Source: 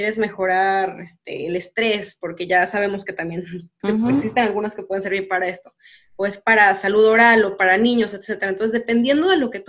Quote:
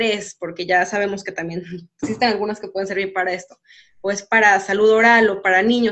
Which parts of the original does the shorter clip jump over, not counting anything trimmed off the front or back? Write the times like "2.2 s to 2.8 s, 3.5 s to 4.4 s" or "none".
3.8 s to 4.2 s